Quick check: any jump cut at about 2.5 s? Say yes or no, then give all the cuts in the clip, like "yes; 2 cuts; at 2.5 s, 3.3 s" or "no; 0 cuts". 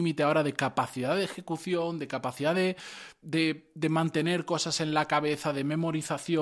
no; 0 cuts